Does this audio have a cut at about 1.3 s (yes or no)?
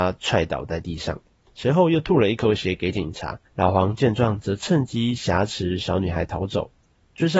no